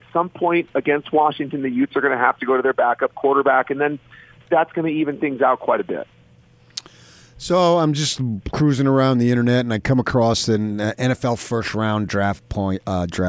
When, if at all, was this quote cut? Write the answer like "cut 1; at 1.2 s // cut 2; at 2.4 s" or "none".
none